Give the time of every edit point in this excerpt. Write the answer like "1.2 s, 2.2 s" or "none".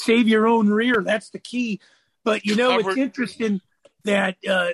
none